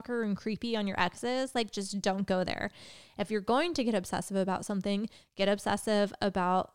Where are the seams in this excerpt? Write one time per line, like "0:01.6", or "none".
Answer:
none

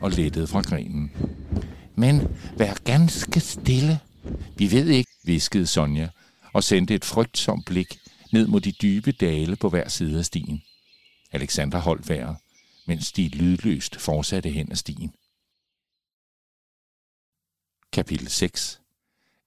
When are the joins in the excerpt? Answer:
0:05.0

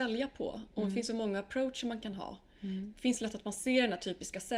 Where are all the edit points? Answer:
none

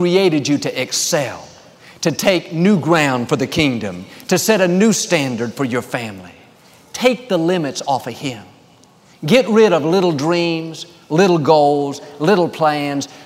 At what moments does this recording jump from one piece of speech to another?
none

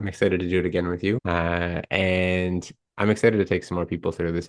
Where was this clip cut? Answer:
0:01.2

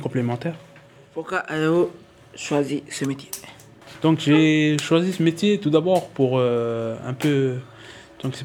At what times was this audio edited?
none

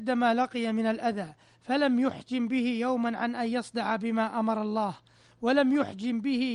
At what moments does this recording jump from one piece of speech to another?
none

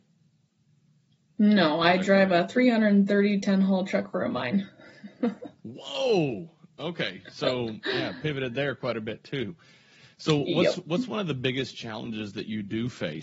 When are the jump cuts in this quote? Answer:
none

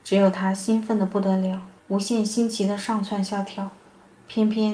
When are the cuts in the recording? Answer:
0:01.8

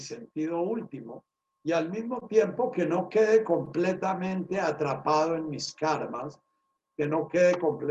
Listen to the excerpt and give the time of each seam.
0:06.8

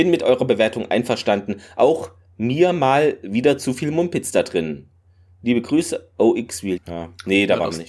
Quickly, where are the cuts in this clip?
0:06.8

